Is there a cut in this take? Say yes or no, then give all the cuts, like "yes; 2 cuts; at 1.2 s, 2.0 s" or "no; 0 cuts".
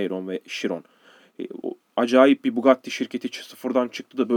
no; 0 cuts